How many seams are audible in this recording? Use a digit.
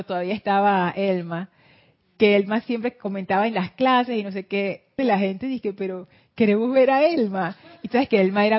1